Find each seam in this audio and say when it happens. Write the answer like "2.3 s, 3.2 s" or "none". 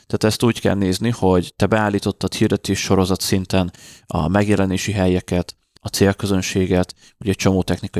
5.8 s